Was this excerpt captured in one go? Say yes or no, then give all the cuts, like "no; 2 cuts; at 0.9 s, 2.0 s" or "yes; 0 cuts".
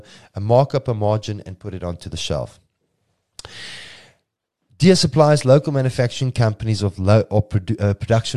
yes; 0 cuts